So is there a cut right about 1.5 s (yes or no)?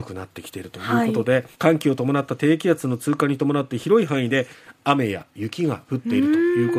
yes